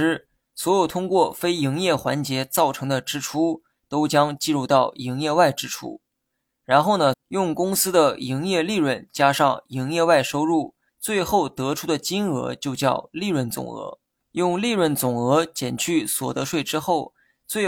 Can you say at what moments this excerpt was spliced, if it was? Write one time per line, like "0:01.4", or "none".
0:07.1
0:10.9
0:14.2